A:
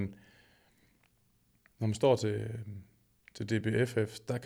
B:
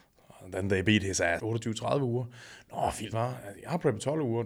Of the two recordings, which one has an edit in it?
B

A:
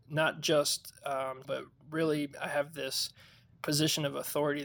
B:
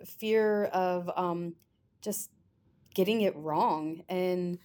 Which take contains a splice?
A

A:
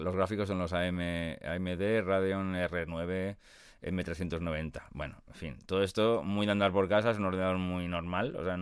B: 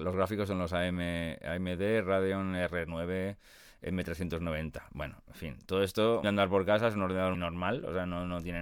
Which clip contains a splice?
B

